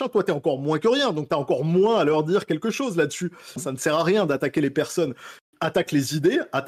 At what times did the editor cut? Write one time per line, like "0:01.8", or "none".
0:03.6